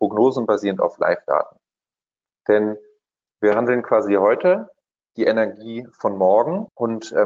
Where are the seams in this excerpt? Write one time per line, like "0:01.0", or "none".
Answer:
none